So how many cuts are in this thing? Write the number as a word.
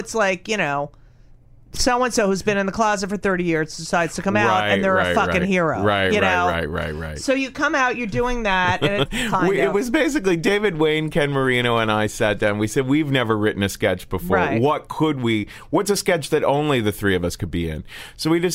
one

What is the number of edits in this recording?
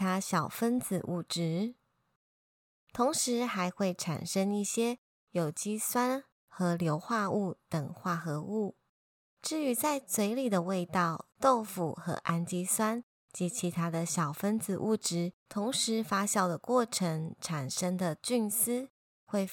three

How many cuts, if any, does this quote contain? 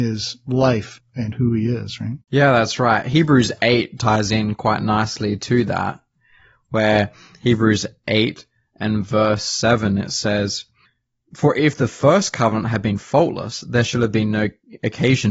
one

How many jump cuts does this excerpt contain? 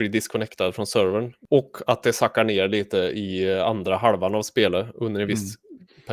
zero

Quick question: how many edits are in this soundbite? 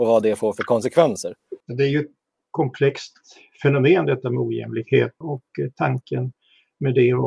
two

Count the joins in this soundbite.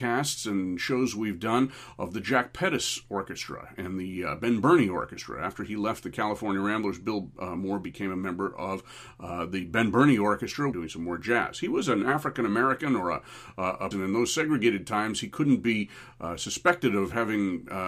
two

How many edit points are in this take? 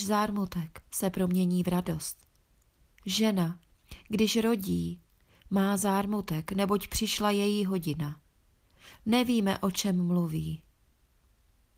one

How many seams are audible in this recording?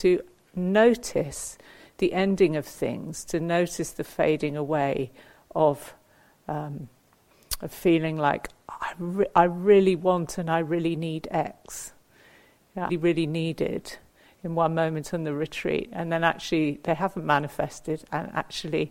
one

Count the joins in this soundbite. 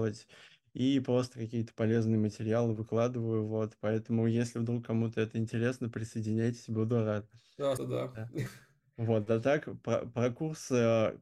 one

